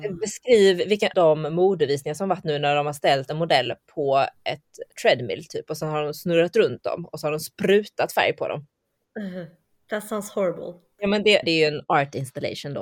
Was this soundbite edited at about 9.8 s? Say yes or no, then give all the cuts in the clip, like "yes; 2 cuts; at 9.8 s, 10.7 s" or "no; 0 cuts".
no; 2 cuts; at 1.1 s, 11.4 s